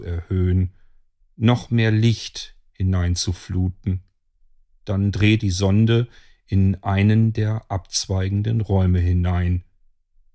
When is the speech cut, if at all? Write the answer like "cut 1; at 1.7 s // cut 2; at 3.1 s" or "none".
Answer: cut 1; at 5.4 s